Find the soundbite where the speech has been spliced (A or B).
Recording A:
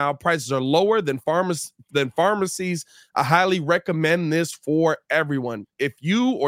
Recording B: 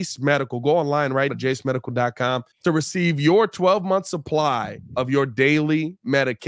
B